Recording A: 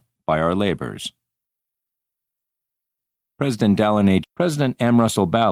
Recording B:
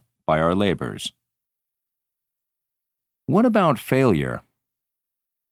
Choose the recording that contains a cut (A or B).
A